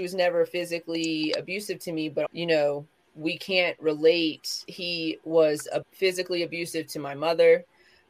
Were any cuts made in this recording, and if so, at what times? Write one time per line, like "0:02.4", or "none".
0:02.3
0:04.7
0:05.8

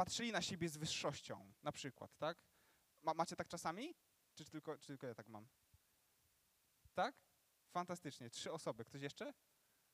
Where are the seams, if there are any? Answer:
none

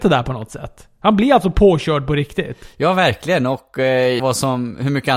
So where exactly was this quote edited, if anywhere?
0:04.2

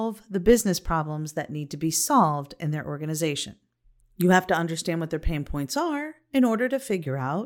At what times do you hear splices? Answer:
0:04.0

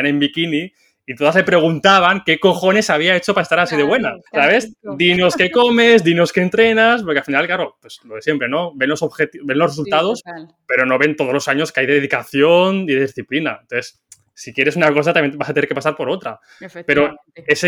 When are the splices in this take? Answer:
0:04.3

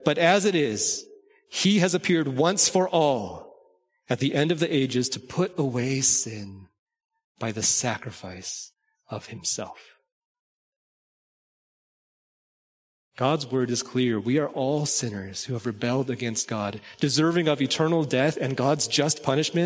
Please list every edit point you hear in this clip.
none

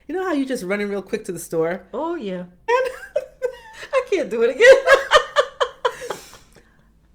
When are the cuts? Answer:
0:02.7

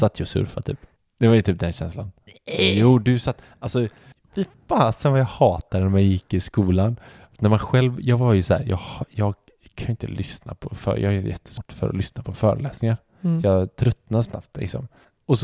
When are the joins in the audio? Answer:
none

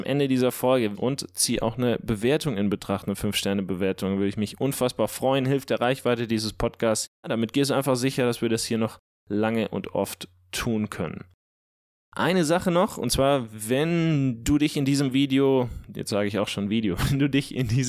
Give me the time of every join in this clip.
0:00.9

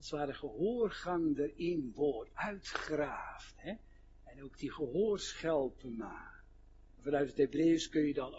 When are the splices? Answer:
0:06.9

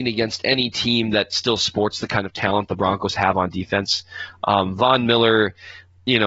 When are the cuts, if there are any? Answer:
none

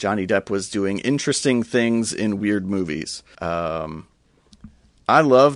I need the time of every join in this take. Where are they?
0:03.4

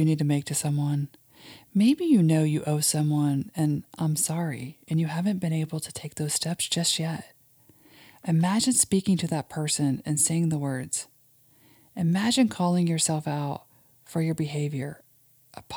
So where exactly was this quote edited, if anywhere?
none

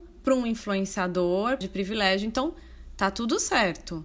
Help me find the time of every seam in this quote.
0:01.6

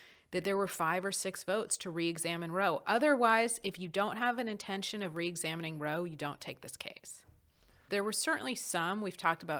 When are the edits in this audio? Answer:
0:07.9

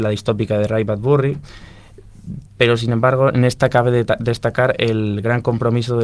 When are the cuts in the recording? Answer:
0:02.5

